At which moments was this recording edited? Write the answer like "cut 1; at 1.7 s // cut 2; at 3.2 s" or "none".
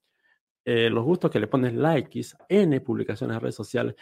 cut 1; at 0.9 s // cut 2; at 2.4 s